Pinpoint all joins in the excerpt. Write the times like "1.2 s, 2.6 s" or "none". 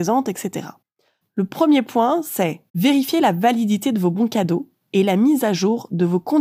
1.2 s, 2.7 s